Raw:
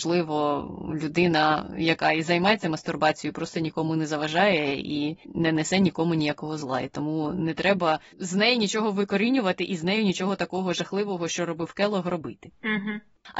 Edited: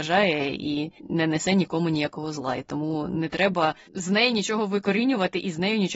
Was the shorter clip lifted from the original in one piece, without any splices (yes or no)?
yes